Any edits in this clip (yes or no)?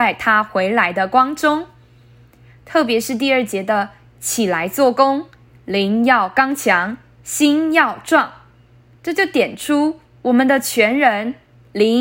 no